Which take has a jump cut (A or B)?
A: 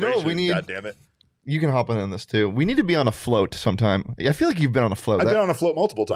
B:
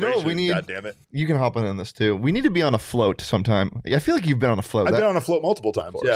B